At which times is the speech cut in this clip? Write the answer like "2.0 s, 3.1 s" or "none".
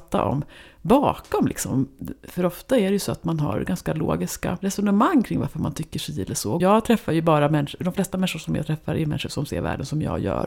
6.6 s